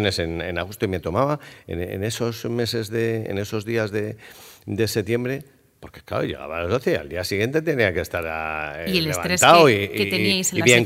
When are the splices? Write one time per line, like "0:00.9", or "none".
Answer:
none

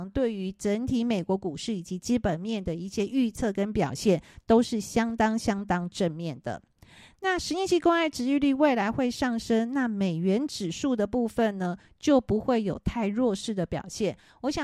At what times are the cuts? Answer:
none

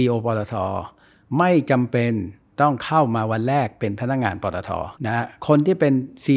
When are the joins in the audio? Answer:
0:05.0

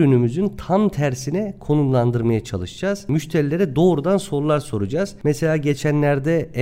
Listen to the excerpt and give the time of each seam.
none

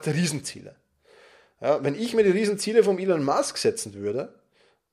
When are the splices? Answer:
none

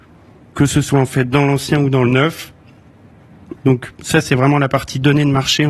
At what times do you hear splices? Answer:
0:03.6

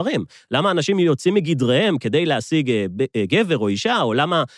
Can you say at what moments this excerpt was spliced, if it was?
none

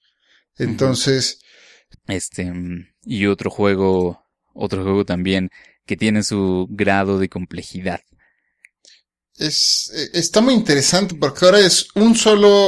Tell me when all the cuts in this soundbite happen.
0:01.9

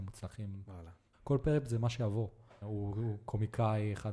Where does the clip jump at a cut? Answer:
0:01.1
0:02.6

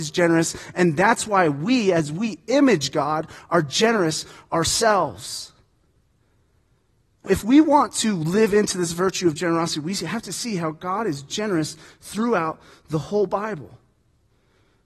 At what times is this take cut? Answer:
0:07.3

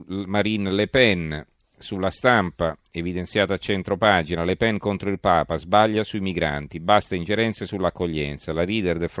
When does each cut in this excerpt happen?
none

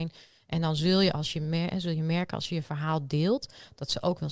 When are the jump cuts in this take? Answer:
none

